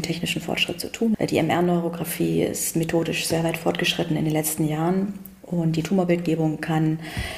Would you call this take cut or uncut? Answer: cut